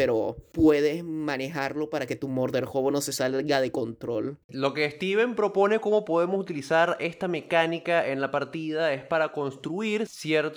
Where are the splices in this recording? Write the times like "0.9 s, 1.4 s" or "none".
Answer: 4.4 s

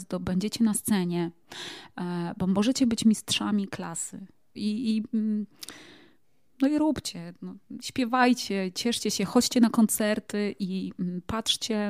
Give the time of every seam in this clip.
4.5 s

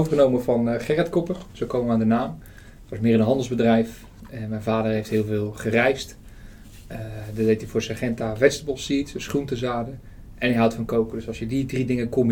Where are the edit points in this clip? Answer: none

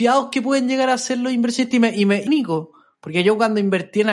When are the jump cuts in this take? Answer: 2.3 s

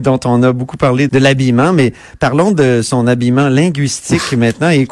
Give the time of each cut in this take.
1.1 s

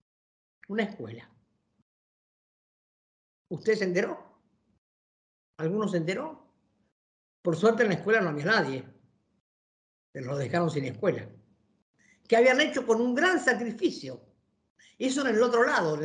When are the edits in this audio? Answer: none

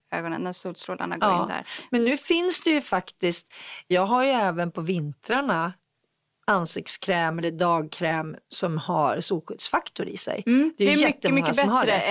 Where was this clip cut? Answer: none

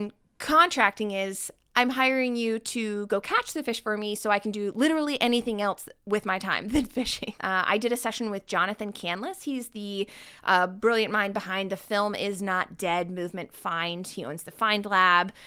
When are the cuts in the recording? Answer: 7.4 s

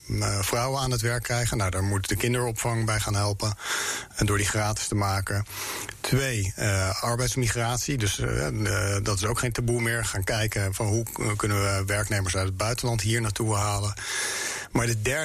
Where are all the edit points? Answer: none

